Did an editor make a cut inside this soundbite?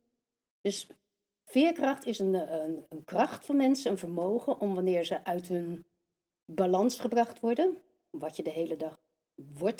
no; 0 cuts

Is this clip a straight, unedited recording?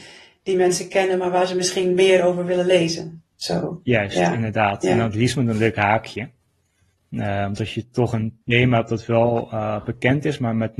yes; 0 cuts

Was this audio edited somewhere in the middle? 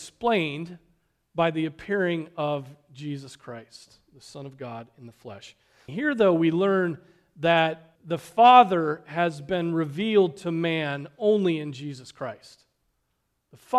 yes; 2 cuts; at 5.9 s, 8.0 s

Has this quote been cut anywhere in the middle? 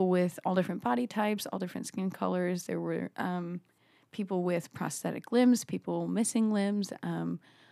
no; 0 cuts

